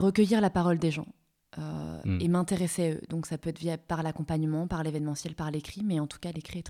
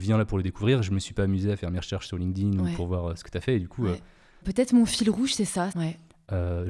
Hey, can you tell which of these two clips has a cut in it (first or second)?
second